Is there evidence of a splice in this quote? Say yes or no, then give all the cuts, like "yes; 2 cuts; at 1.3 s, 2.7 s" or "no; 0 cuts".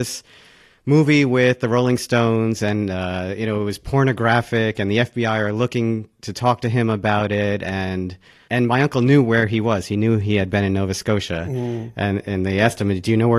no; 0 cuts